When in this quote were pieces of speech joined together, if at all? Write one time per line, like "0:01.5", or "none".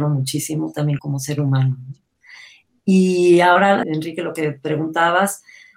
0:01.0
0:03.8